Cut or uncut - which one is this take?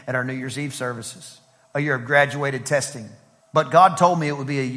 cut